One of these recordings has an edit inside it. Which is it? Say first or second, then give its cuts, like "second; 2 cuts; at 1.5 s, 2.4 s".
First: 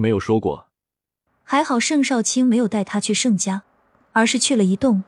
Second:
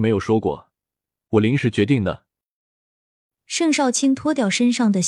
first; 1 cut; at 1.3 s